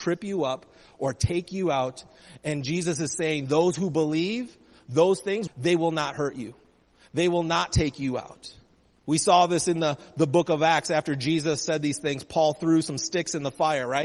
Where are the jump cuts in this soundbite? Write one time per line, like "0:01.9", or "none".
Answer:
0:05.5